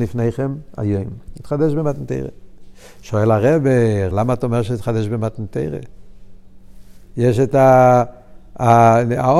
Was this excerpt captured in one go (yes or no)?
no